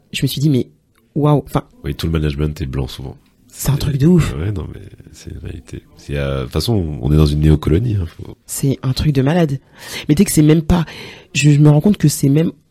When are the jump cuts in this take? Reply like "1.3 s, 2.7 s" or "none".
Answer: 1.7 s